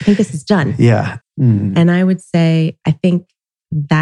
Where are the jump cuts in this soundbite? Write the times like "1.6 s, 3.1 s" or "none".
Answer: 1.2 s

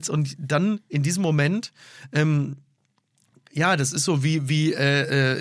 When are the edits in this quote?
none

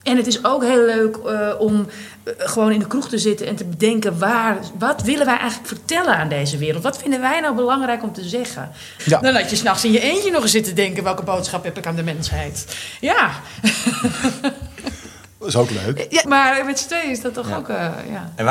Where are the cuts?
9.0 s, 16.2 s

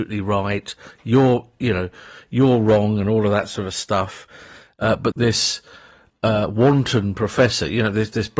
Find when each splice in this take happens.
5.1 s

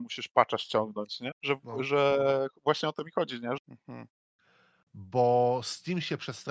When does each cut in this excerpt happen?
1.3 s, 3.6 s

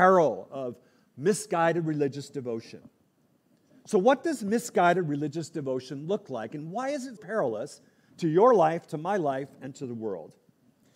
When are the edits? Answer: 7.2 s

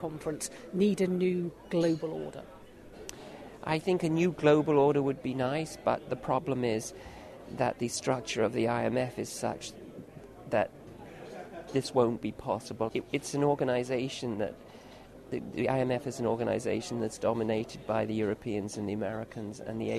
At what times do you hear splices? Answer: 12.9 s

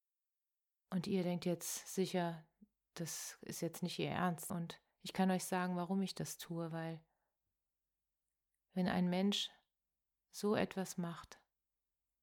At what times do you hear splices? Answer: 4.5 s

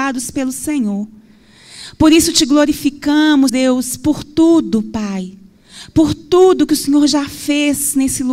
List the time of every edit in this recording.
3.5 s

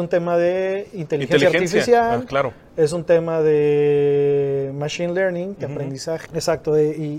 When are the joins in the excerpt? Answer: 6.3 s

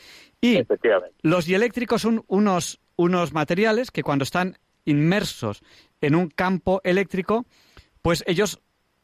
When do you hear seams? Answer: none

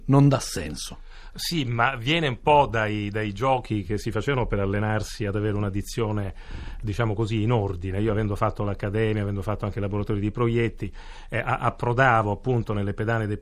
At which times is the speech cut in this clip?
none

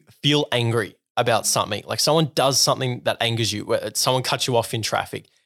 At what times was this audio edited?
none

